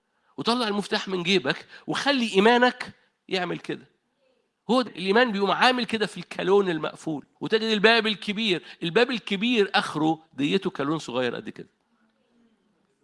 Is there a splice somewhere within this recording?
yes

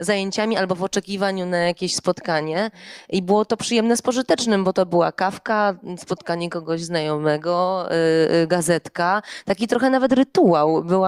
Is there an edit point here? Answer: no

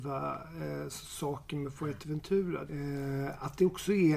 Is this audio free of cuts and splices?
no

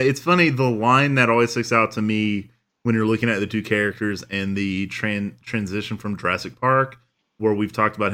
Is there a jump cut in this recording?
no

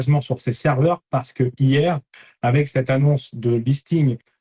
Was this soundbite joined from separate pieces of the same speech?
no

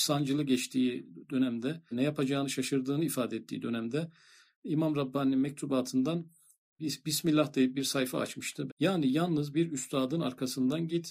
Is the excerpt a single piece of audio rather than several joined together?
no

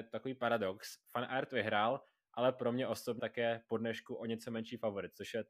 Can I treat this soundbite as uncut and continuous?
no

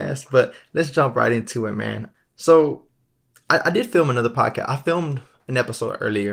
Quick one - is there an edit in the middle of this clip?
yes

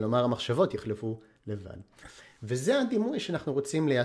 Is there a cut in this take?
no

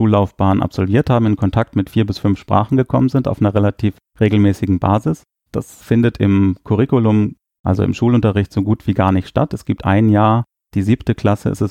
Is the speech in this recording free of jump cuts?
no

